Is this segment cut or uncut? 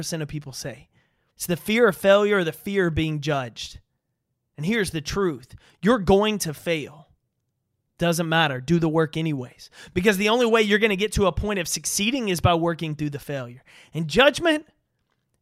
cut